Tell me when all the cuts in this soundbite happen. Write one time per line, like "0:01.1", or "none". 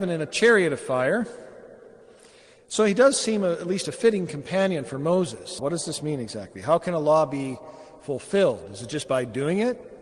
0:05.6